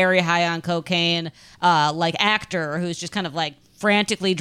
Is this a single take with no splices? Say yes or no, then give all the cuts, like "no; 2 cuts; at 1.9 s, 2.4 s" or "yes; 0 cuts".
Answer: yes; 0 cuts